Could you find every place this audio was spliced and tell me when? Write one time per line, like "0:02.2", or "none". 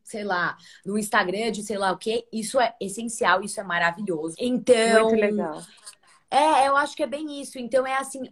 0:04.3